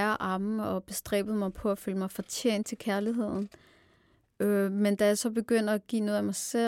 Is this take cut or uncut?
uncut